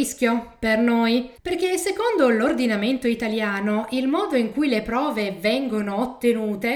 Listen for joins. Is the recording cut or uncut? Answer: cut